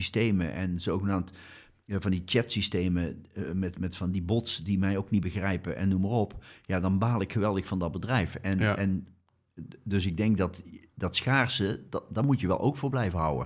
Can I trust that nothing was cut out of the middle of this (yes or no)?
yes